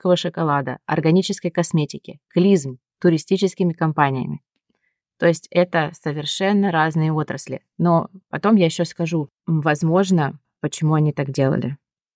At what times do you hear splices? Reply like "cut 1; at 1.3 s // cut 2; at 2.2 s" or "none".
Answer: none